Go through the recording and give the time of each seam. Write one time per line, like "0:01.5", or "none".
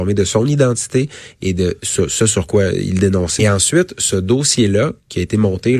0:03.4

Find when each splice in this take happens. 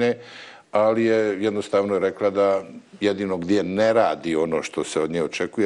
none

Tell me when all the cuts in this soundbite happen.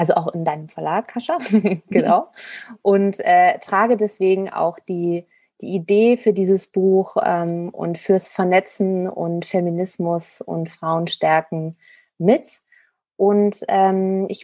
none

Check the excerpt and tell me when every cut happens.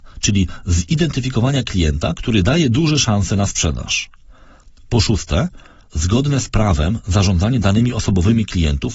0:05.9

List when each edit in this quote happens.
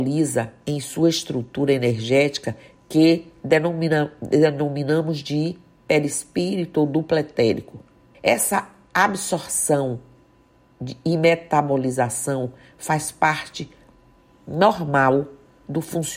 0:08.1

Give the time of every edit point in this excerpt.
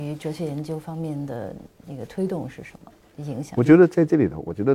none

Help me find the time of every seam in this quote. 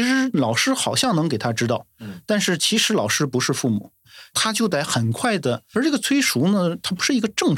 0:05.7

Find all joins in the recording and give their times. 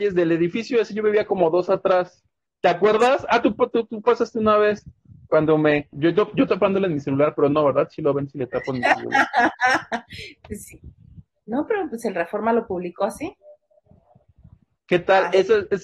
0:05.9

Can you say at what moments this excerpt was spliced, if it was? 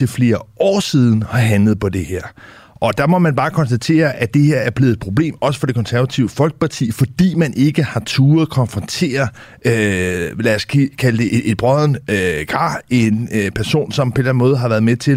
0:11.3

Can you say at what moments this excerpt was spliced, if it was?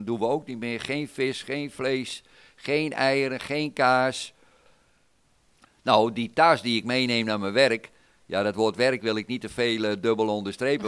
none

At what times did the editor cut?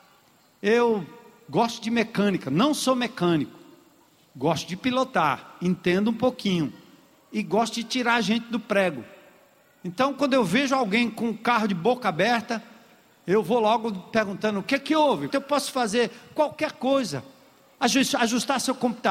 0:15.3

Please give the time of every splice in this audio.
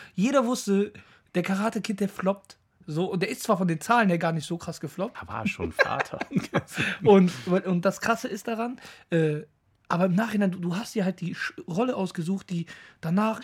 0:05.1

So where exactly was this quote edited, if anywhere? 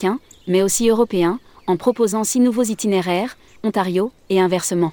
0:03.6

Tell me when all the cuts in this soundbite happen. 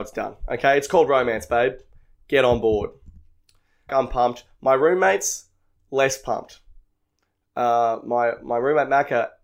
0:03.9

